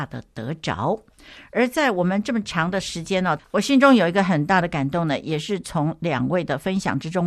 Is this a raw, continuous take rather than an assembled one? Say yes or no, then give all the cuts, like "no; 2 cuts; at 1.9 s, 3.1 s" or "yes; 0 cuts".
no; 1 cut; at 3.4 s